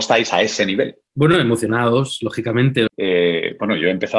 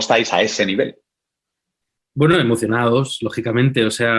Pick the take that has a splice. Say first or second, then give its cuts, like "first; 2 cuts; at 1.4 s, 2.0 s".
first; 2 cuts; at 1.1 s, 2.9 s